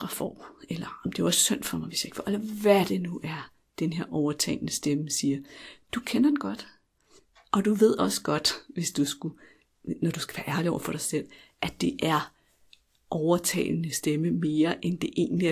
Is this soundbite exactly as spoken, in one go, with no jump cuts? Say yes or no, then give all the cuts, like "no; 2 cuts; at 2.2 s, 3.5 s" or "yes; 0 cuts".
yes; 0 cuts